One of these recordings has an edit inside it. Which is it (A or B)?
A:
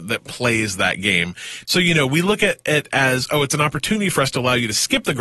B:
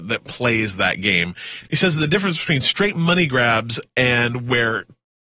A